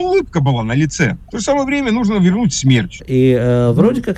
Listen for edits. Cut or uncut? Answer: cut